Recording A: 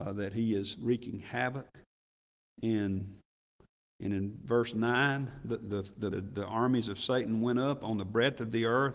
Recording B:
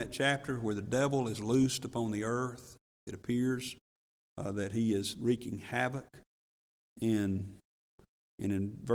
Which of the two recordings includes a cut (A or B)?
A